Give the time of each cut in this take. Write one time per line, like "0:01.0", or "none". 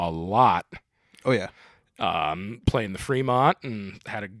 none